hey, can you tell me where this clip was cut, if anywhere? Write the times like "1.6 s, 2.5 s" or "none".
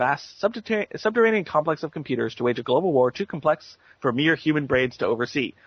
none